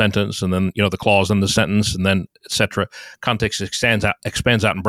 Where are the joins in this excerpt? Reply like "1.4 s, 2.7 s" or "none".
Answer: none